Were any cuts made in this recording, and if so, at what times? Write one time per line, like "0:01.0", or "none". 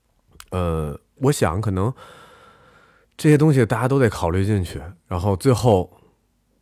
0:01.2

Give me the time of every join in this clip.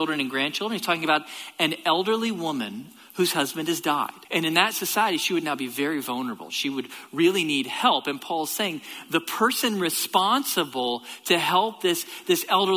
0:04.2

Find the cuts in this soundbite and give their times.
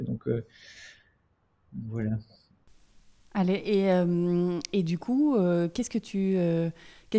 none

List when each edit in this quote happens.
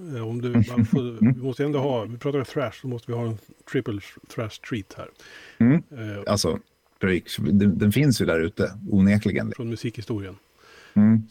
0:06.2
0:09.5

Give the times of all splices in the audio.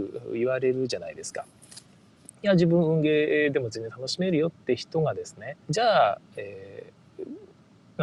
0:02.3
0:05.6

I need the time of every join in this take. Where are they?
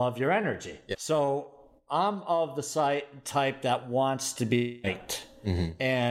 0:00.9

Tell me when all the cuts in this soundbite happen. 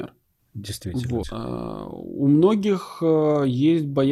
0:01.2

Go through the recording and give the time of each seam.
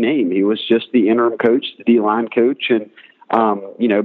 none

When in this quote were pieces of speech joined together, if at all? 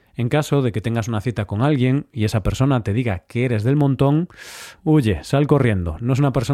0:04.8

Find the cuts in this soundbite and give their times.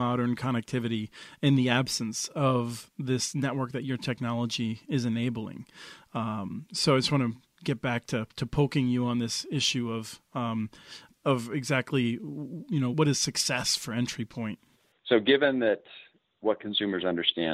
0:11.1
0:12.9

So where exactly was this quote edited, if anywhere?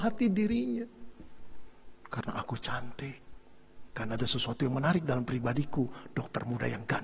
0:02.0
0:03.9

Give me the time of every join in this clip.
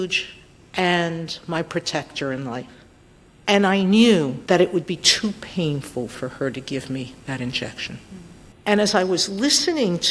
0:04.5
0:08.5

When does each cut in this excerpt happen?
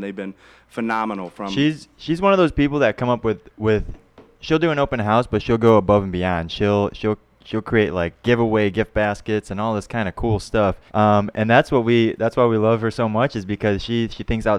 0:10.9

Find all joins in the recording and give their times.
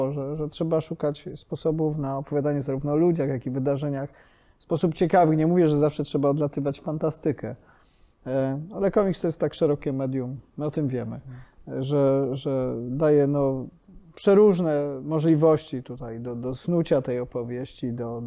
none

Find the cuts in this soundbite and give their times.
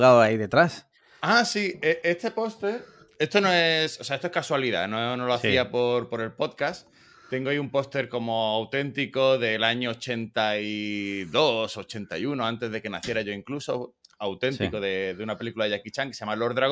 none

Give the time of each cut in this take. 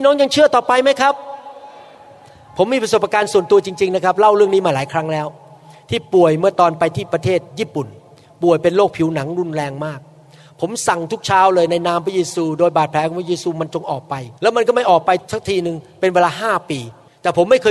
0:14.4

